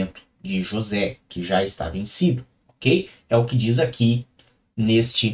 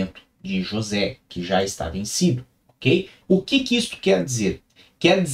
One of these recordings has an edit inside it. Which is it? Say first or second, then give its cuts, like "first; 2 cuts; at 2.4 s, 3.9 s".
second; 1 cut; at 3.2 s